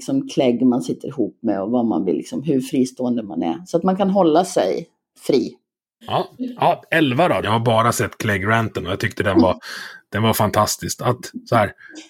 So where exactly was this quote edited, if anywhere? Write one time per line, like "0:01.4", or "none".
0:06.0
0:07.4